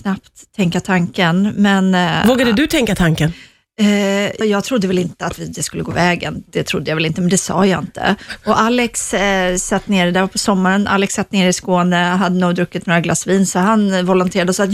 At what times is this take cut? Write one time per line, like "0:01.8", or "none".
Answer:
0:04.4